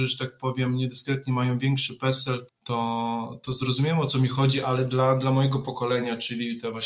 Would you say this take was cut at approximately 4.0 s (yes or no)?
no